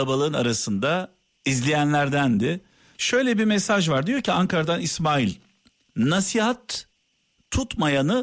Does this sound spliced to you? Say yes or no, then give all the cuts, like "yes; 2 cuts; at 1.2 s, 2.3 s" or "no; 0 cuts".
yes; 1 cut; at 2.9 s